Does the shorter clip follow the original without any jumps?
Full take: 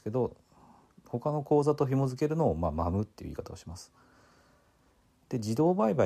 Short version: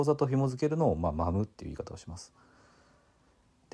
yes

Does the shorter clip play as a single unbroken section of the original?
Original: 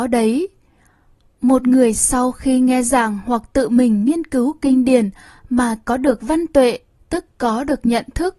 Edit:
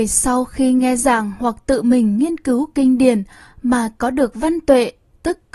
yes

